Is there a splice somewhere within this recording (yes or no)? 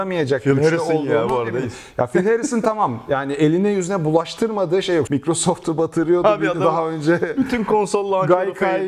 yes